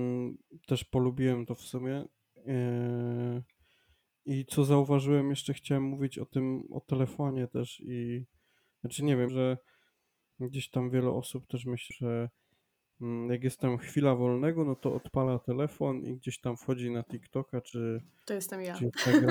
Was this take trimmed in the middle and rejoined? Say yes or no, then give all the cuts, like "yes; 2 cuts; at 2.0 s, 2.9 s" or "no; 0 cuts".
yes; 2 cuts; at 9.3 s, 11.9 s